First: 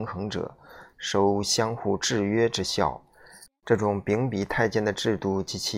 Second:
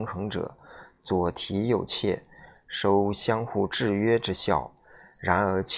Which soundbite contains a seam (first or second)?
first